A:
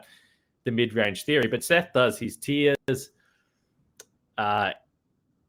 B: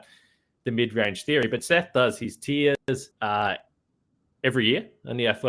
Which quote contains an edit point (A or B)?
B